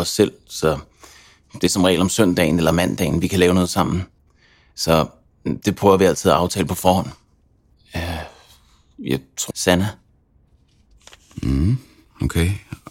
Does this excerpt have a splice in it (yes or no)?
yes